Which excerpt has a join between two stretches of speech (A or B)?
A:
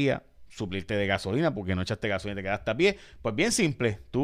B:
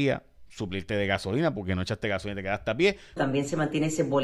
B